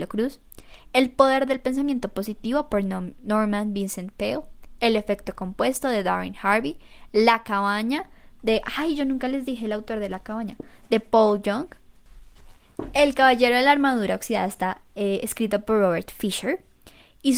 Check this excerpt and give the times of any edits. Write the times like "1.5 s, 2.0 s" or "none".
none